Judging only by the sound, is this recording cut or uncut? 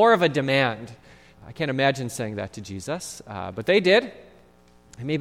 cut